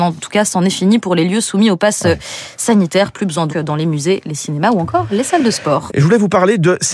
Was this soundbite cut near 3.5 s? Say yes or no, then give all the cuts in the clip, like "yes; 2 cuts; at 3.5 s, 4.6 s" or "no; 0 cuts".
yes; 2 cuts; at 3.5 s, 5.9 s